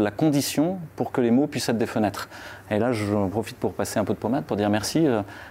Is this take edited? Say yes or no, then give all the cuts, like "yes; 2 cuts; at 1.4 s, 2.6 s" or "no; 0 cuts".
no; 0 cuts